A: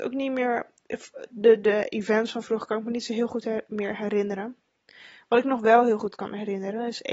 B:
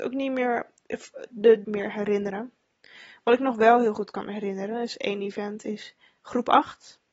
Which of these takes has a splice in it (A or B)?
B